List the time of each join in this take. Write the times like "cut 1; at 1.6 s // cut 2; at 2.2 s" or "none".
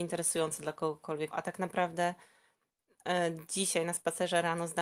cut 1; at 1.3 s